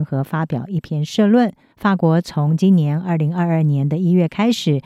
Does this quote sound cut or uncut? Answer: cut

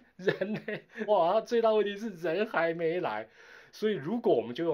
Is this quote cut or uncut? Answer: cut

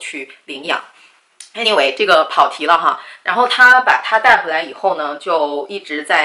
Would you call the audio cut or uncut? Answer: uncut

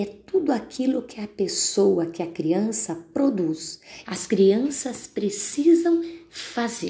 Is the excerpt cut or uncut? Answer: cut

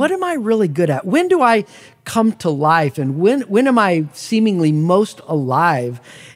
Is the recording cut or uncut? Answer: uncut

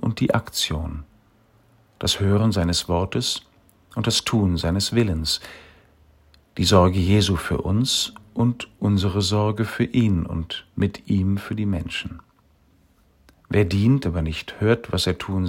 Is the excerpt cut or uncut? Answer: cut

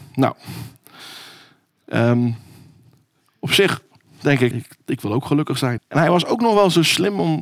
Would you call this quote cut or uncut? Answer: cut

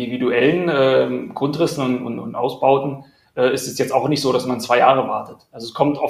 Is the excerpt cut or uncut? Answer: uncut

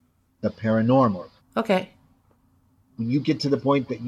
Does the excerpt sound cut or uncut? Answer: cut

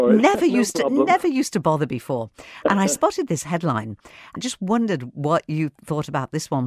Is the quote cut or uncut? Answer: cut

